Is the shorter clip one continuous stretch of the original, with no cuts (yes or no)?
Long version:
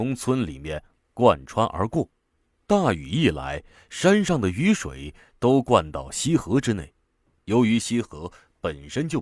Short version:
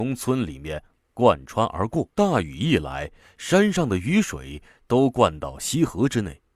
no